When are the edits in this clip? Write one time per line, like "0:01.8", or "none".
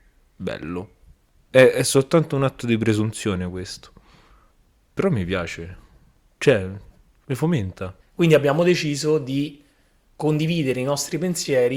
0:08.0